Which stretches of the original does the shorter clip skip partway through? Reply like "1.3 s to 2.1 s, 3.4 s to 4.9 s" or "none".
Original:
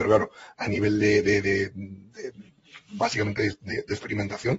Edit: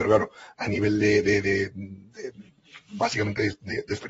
none